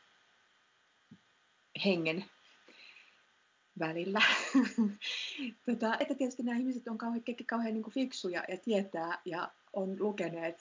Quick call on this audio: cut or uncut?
cut